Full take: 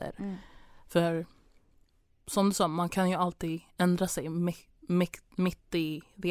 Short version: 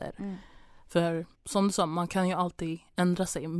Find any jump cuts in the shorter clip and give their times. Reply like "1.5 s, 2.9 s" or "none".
1.3 s